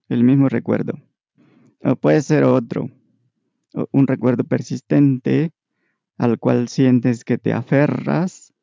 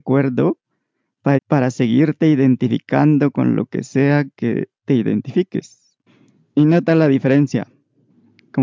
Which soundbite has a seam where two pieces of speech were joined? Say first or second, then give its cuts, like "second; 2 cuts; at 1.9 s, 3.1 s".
second; 2 cuts; at 1.4 s, 6.4 s